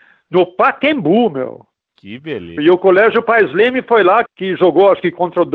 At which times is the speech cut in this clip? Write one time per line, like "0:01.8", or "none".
0:02.6
0:04.3